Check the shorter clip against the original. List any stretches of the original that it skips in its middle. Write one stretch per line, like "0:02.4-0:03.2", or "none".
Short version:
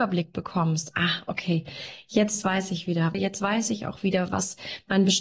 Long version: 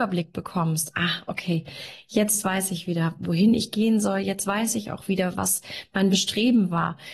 0:03.1-0:04.2